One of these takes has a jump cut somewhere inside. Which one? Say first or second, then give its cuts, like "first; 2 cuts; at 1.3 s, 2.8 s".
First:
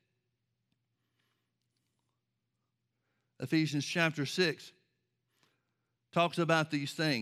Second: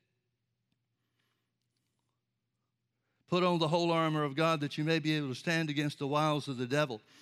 second; 1 cut; at 3.1 s